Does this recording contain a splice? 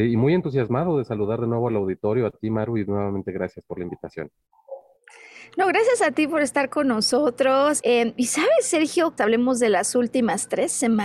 yes; 2 cuts; at 7.8 s, 9.2 s

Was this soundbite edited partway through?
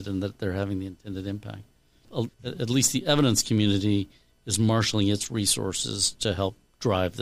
yes; 1 cut; at 2.3 s

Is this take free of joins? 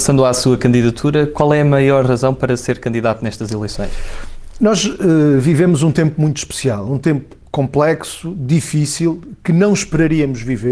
yes; 0 cuts

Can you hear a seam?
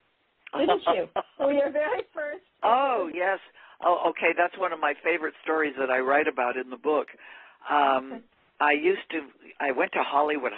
yes; 1 cut; at 3.1 s

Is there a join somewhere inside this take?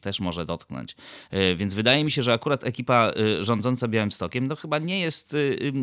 no; 0 cuts

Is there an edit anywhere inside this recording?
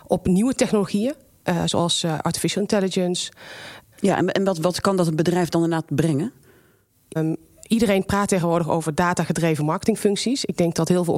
yes; 2 cuts; at 3.9 s, 7.2 s

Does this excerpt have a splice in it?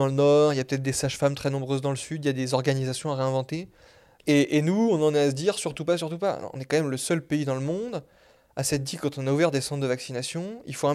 yes; 1 cut; at 4.2 s

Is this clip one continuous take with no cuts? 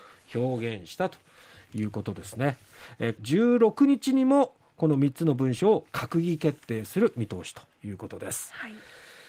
no; 1 cut; at 3.2 s

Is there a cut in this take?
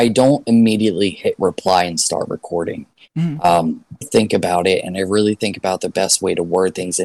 yes; 1 cut; at 4.0 s

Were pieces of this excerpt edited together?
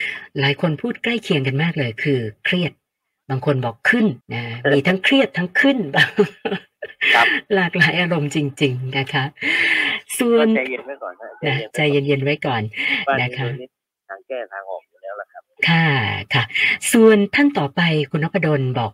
yes; 1 cut; at 4.2 s

